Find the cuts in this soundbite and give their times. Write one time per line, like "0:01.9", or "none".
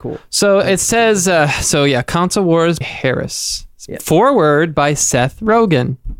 0:02.8